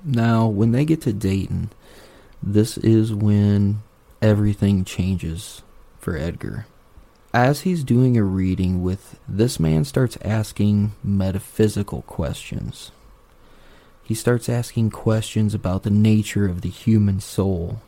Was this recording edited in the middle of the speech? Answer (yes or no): yes